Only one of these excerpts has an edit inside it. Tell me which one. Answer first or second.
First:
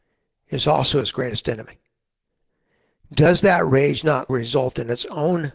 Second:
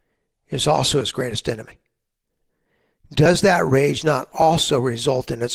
first